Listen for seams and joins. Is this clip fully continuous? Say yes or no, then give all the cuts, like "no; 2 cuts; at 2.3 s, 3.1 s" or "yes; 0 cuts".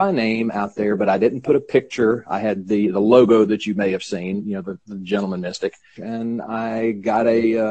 no; 1 cut; at 6.0 s